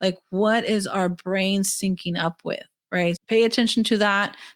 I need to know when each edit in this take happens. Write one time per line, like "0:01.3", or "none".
0:03.2